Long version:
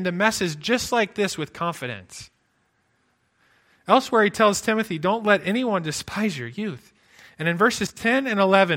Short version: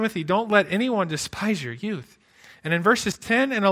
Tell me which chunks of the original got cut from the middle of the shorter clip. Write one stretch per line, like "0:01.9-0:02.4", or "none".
none